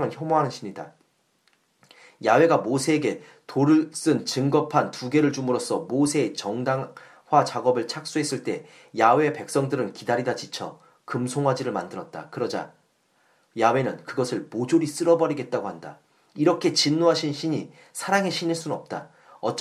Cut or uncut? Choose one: uncut